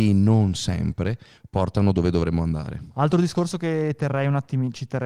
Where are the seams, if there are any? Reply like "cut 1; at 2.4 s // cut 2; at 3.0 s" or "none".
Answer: cut 1; at 2.9 s